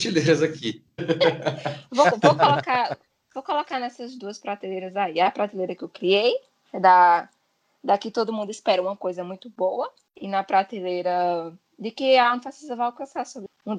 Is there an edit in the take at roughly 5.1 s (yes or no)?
no